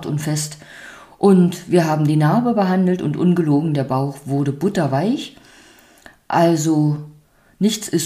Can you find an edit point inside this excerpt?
no; 0 cuts

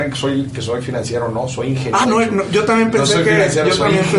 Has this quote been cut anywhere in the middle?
yes; 1 cut; at 2.0 s

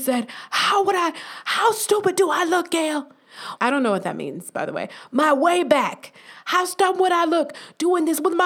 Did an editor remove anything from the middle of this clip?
yes; 1 cut; at 3.6 s

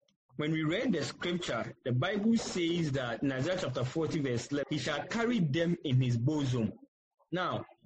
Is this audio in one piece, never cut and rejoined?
no; 1 cut; at 4.6 s

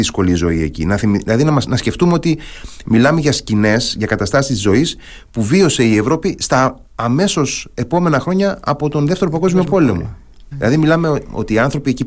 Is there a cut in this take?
yes; 2 cuts; at 6.9 s, 10.5 s

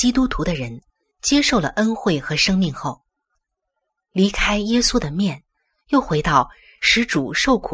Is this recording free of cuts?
yes; 0 cuts

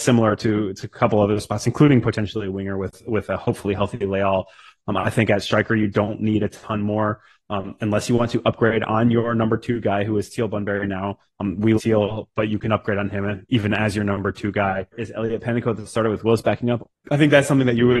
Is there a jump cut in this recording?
yes; 3 cuts; at 11.7 s, 14.9 s, 16.9 s

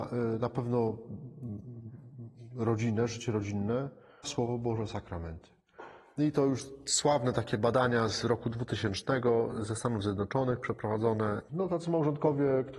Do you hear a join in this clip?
yes; 2 cuts; at 4.2 s, 11.5 s

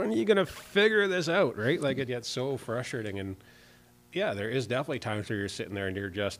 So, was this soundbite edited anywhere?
yes; 1 cut; at 2.1 s

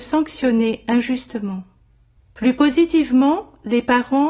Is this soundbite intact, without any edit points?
no; 1 cut; at 2.2 s

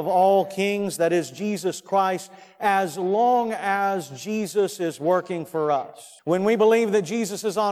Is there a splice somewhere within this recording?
yes; 1 cut; at 6.2 s

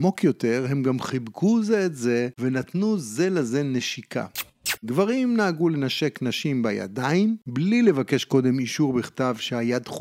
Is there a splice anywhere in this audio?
yes; 1 cut; at 4.8 s

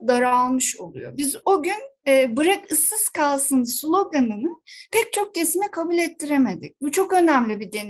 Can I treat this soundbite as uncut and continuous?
no; 1 cut; at 1.4 s

